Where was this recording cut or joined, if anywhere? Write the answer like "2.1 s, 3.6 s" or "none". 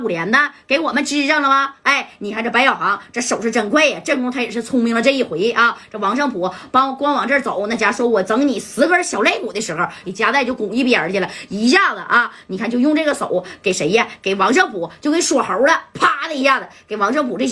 10.0 s